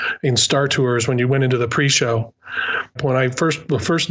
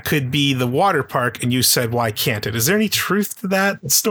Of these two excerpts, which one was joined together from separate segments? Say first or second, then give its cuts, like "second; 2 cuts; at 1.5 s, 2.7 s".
first; 1 cut; at 3.0 s